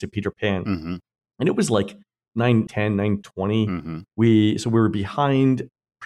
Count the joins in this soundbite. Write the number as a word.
one